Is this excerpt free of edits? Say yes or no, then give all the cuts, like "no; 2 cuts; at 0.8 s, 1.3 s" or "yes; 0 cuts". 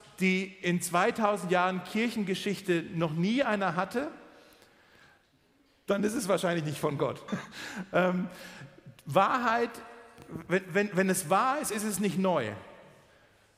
no; 1 cut; at 7.3 s